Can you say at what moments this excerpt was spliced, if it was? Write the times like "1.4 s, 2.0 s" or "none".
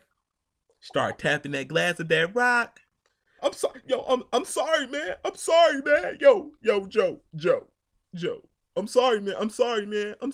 3.4 s